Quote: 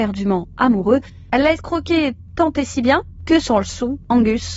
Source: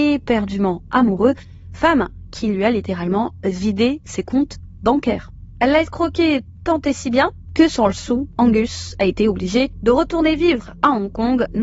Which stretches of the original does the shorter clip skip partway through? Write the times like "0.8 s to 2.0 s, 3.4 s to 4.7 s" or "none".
1.6 s to 5.6 s